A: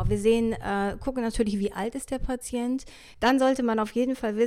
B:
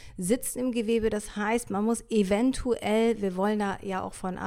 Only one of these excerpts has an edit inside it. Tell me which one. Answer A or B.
A